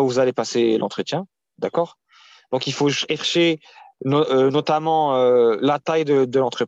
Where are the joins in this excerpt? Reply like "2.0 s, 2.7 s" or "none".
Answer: none